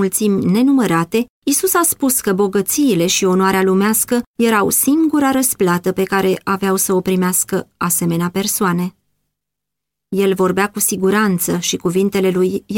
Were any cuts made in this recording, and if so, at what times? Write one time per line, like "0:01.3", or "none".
none

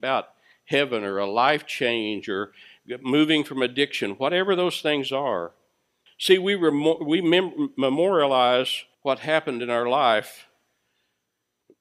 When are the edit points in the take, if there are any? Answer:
0:06.1
0:08.9

